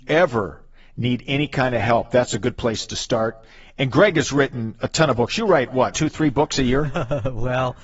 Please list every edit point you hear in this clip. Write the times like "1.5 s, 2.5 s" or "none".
5.9 s